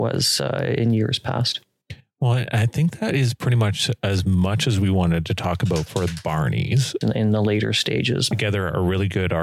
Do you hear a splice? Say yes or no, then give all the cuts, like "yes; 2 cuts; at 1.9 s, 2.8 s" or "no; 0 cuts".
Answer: yes; 2 cuts; at 7.0 s, 8.3 s